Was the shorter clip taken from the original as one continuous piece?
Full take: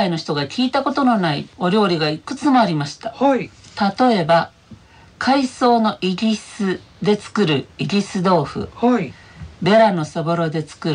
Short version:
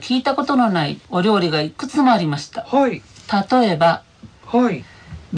no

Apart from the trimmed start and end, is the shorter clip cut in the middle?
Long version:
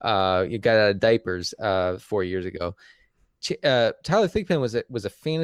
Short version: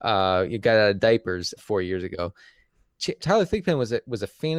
yes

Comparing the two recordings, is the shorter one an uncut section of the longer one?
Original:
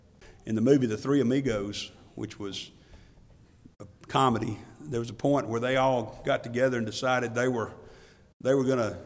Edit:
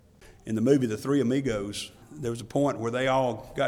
no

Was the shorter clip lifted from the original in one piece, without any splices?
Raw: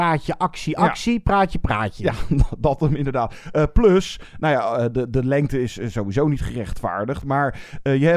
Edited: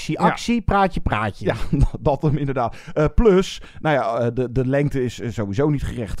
yes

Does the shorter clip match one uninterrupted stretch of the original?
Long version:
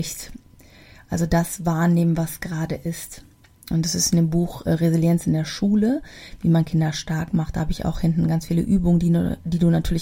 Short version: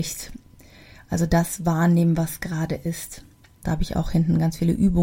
no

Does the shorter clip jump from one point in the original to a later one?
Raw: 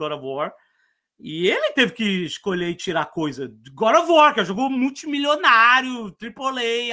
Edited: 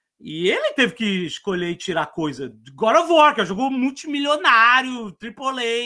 no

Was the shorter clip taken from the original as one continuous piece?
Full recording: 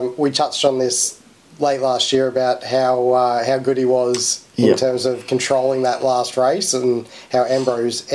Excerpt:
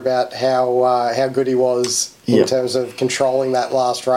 yes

